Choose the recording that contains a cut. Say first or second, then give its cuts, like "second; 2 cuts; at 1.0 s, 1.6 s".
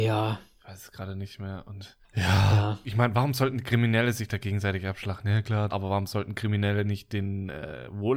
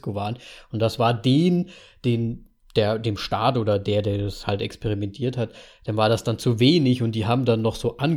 first; 2 cuts; at 2.0 s, 5.7 s